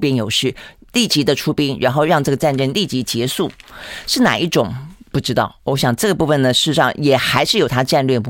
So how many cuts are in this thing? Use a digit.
0